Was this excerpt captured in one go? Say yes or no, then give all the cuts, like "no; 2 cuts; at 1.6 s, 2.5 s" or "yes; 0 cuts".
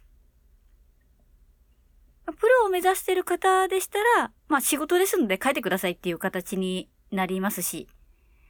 no; 2 cuts; at 2.2 s, 4.4 s